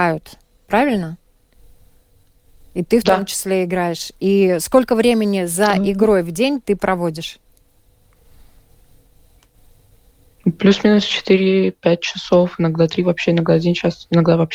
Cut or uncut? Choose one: uncut